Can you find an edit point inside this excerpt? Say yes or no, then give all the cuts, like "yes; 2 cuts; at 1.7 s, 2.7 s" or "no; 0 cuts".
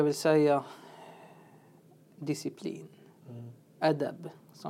no; 0 cuts